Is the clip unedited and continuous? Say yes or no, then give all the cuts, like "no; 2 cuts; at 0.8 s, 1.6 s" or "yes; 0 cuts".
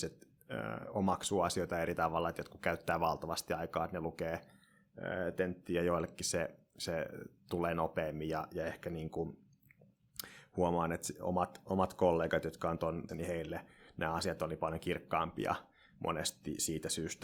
no; 1 cut; at 13.1 s